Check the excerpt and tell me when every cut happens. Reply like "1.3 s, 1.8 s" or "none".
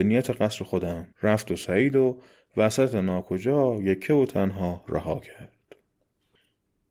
1.1 s